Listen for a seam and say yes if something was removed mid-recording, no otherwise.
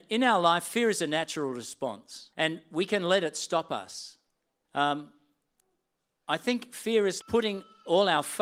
yes